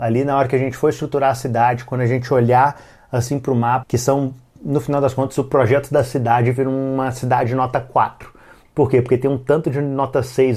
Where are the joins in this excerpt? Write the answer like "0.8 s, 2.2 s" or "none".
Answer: 3.8 s